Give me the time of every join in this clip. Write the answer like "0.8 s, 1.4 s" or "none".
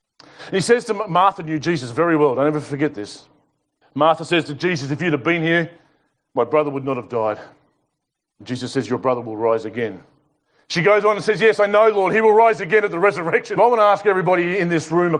3.8 s, 13.6 s